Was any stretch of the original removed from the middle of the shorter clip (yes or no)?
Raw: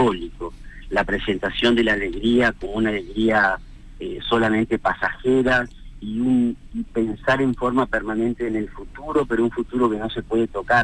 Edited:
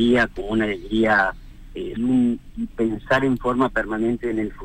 yes